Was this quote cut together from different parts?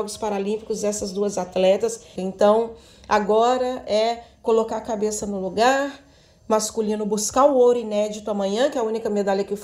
yes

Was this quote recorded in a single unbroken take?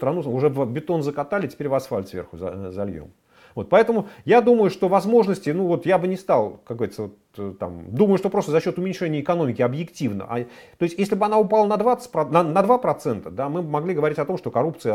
yes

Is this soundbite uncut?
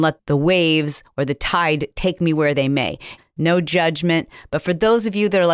no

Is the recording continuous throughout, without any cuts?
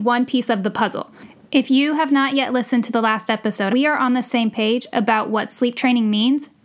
no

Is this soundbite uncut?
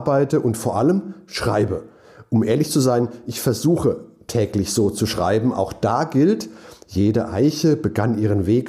yes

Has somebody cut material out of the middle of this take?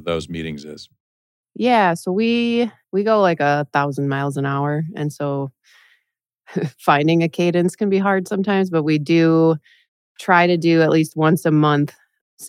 no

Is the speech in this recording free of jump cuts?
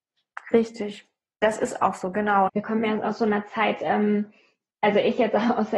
no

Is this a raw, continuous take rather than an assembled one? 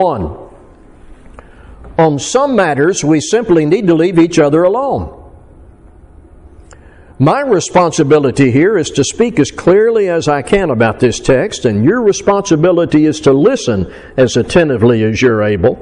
yes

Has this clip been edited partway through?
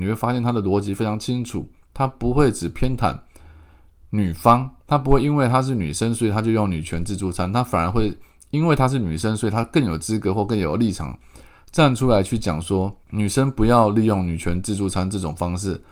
yes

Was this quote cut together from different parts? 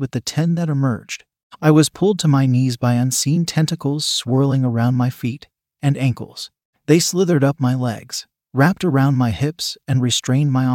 no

